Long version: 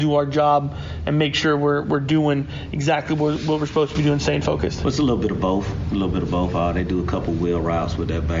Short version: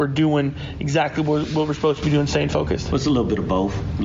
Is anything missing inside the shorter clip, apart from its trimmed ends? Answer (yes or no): no